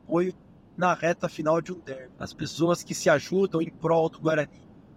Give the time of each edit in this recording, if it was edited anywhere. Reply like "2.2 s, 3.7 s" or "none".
2.2 s

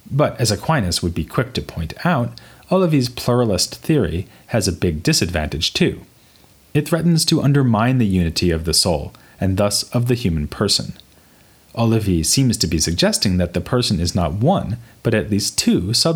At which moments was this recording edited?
none

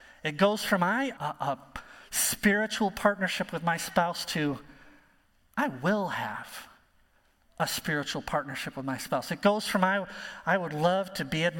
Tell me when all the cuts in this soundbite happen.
1.2 s

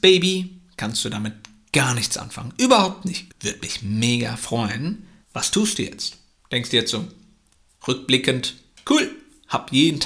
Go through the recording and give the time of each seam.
3.3 s, 5.2 s

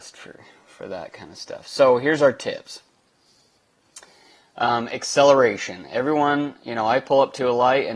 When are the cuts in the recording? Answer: none

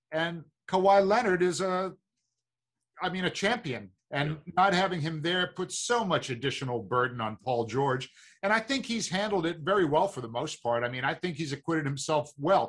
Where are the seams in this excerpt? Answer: 4.0 s

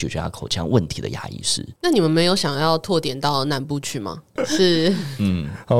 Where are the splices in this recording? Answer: 1.8 s, 4.4 s

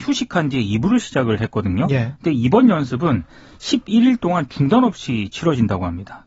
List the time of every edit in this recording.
none

